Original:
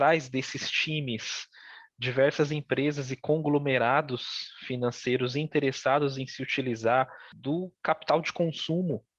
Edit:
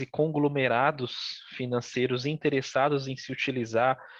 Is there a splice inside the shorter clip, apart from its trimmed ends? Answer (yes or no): no